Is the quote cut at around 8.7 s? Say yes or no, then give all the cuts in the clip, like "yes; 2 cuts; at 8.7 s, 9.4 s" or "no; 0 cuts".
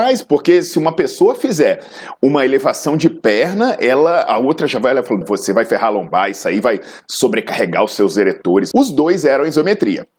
yes; 2 cuts; at 5.2 s, 8.7 s